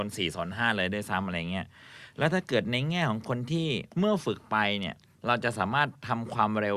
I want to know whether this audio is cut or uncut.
cut